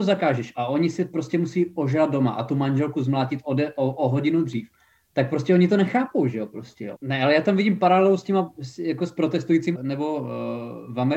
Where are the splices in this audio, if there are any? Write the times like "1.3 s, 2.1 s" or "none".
6.9 s, 9.7 s

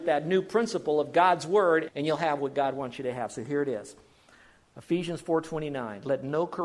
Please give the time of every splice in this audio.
1.9 s

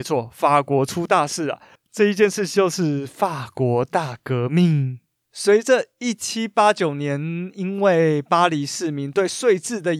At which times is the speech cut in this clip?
none

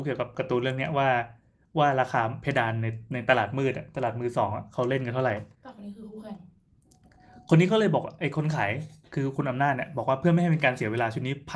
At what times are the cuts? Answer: 5.5 s

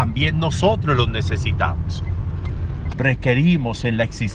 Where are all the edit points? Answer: 2.9 s

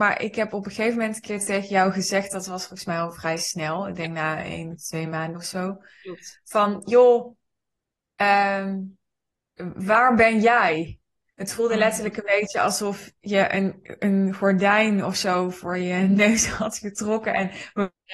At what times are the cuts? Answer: none

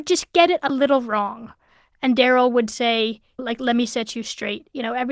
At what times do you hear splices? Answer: 3.4 s

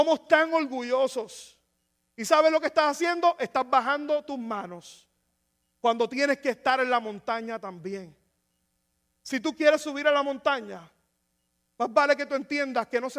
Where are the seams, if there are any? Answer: none

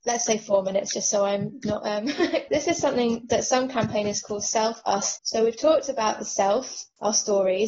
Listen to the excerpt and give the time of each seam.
2.5 s, 5.2 s

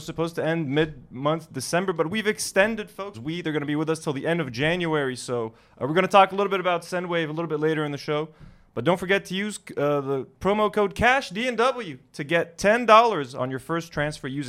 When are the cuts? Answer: 3.1 s

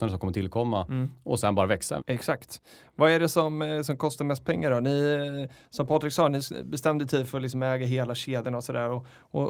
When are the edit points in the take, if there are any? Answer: 2.0 s

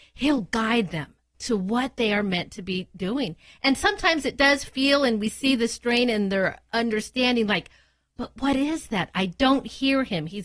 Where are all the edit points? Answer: none

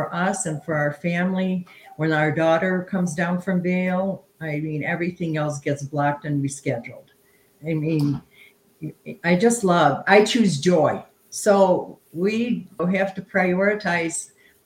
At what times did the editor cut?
7.5 s, 12.8 s

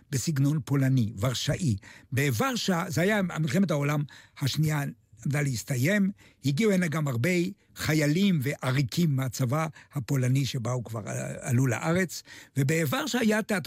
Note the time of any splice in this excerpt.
none

